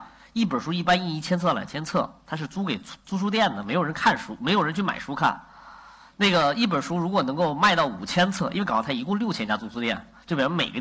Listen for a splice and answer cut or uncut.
uncut